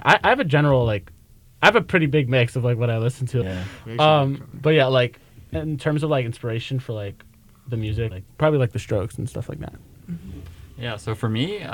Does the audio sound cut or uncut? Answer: cut